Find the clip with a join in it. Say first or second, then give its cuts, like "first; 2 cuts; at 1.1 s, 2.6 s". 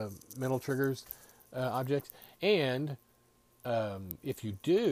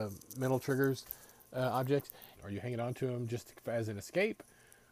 second; 1 cut; at 2.4 s